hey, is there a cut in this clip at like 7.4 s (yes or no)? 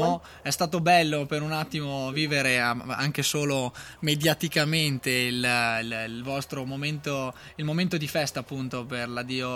no